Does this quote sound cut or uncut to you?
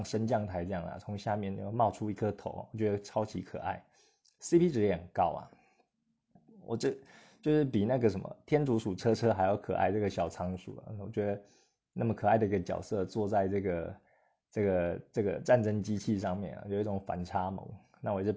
uncut